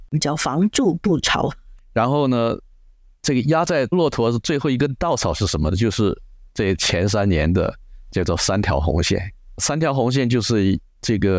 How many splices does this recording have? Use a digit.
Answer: 1